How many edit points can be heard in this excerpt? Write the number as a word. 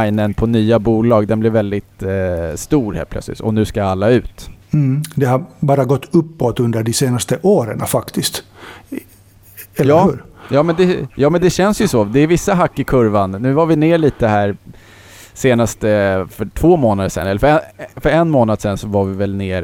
two